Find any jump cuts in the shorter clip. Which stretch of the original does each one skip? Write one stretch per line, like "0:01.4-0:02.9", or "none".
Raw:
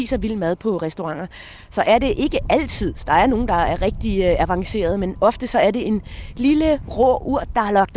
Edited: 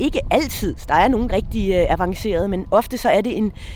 0:03.5-0:03.8